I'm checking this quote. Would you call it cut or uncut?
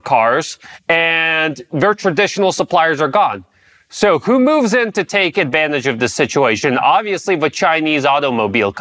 uncut